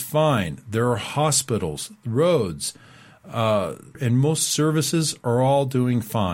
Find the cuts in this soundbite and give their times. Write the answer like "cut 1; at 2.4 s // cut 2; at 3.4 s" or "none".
cut 1; at 3.9 s